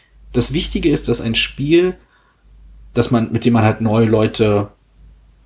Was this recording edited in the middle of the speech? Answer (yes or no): no